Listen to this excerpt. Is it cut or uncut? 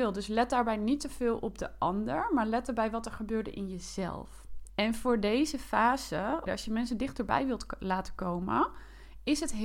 cut